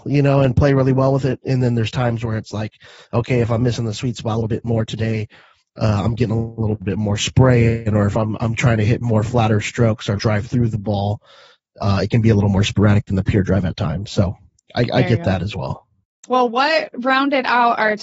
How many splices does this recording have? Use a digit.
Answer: 1